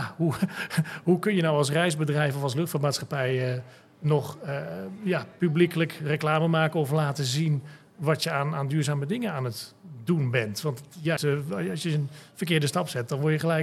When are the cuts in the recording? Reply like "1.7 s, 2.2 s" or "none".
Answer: 11.2 s